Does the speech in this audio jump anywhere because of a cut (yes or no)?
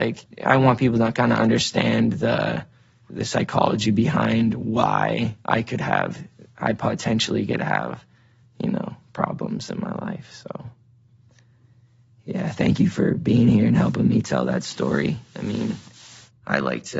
yes